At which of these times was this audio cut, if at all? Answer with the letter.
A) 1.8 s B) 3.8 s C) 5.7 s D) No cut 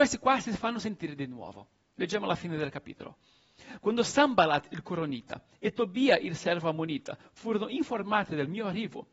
B